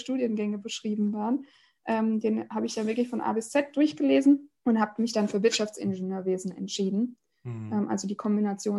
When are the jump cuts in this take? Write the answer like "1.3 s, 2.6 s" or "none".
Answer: 4.6 s